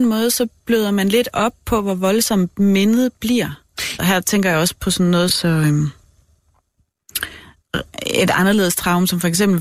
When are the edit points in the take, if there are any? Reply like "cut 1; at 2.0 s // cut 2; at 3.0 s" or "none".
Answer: cut 1; at 4.0 s // cut 2; at 5.3 s